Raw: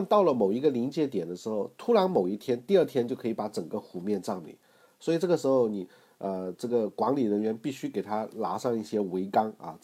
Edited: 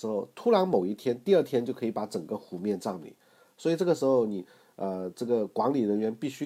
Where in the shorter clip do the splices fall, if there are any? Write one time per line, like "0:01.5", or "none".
none